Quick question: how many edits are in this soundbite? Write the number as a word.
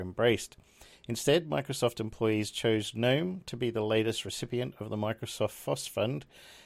zero